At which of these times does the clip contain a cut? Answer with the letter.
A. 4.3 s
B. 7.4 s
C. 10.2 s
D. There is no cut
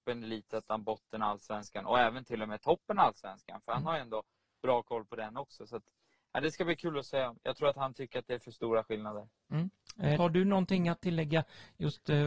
C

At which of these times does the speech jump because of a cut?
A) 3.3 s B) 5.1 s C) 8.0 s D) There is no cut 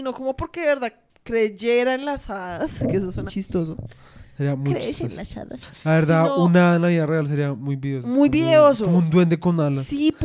A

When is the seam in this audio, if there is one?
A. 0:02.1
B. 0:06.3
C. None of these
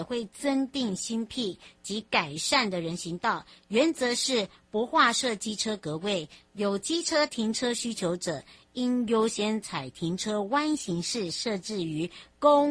C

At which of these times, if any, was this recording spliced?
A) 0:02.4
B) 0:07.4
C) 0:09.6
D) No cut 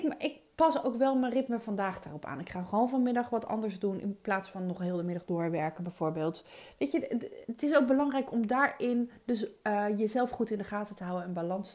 B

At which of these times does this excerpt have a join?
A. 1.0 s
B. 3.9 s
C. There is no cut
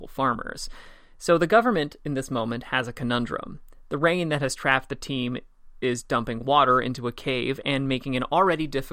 C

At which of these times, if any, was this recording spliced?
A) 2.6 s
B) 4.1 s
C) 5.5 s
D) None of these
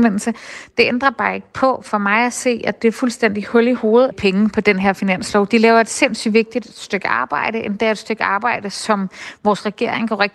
B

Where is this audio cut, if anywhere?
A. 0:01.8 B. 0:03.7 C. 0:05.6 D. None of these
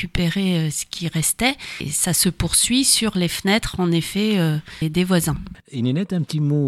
D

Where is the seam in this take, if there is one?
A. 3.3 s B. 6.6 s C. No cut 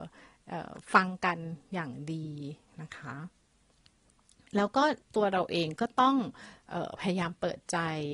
C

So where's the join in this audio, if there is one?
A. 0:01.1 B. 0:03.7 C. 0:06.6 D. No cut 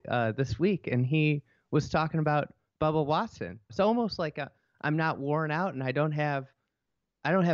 B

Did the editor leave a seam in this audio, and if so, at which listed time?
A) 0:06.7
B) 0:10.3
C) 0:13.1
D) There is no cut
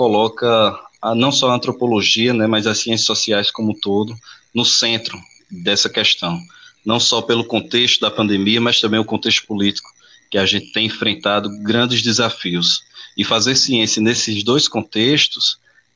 D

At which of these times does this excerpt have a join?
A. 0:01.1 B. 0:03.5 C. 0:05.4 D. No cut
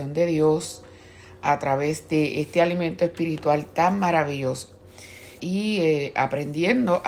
C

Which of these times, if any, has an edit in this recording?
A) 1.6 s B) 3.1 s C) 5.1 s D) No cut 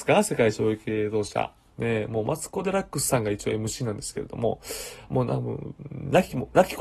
D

